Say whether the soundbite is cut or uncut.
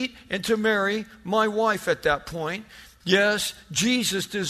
cut